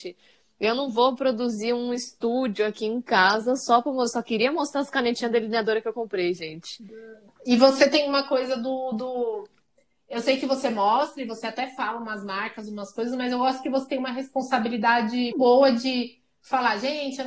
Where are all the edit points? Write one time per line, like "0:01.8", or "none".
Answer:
0:07.4
0:15.3